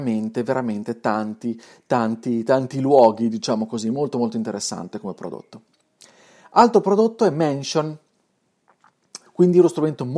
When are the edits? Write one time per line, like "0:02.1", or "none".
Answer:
0:09.3

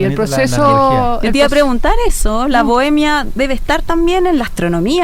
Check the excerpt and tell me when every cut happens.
none

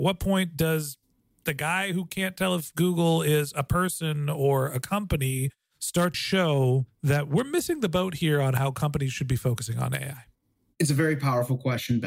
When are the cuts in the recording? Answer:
0:06.1

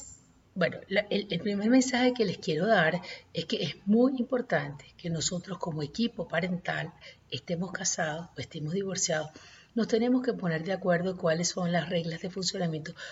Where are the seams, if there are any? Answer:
none

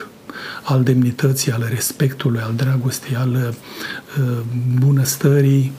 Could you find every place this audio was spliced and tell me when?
none

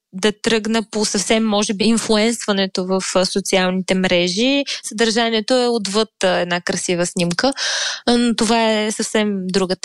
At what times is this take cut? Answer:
0:01.8
0:04.8

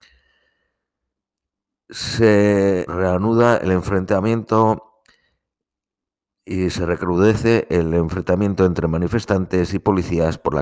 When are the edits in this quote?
0:02.9

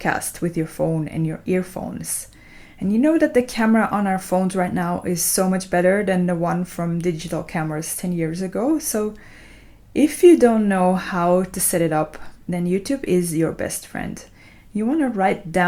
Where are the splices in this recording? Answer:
none

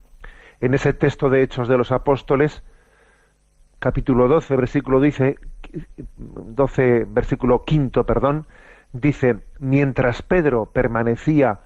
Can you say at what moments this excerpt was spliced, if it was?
none

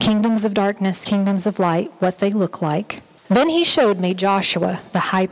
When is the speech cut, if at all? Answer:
none

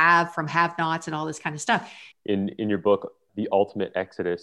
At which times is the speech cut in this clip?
0:02.1
0:03.3

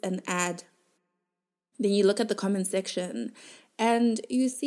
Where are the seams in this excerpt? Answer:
none

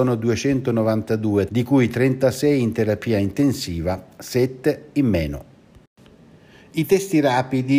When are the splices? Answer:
0:01.5

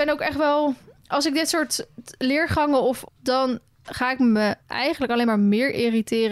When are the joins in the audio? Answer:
0:03.0
0:04.6

